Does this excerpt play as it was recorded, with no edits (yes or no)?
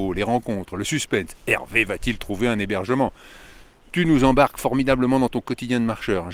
yes